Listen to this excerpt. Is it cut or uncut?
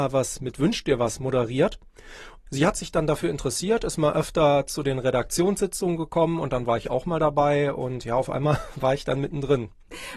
uncut